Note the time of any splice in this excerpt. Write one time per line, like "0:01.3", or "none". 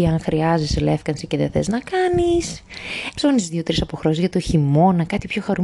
0:03.1